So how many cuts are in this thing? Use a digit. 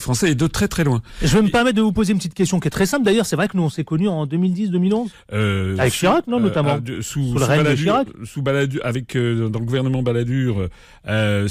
1